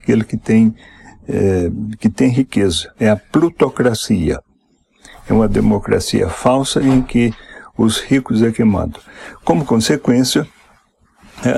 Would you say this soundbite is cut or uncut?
uncut